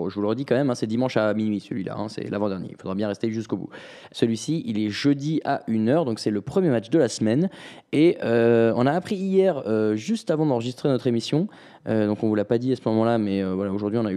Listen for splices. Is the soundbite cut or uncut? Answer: cut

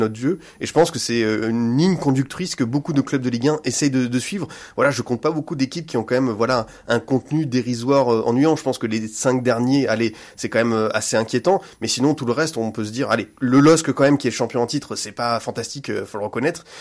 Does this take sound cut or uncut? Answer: uncut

